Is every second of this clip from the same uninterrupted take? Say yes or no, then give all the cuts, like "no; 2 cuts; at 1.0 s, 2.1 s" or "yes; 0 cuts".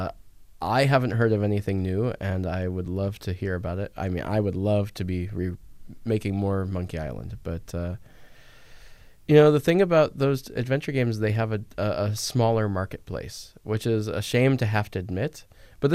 yes; 0 cuts